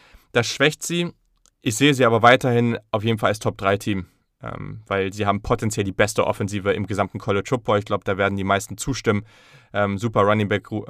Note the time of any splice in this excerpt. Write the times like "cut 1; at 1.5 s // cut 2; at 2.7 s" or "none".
none